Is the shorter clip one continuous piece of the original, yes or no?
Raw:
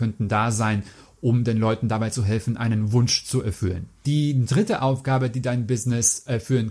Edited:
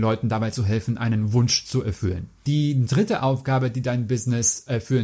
yes